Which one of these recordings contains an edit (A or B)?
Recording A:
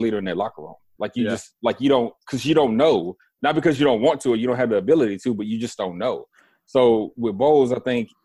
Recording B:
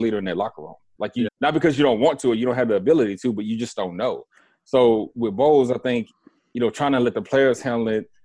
B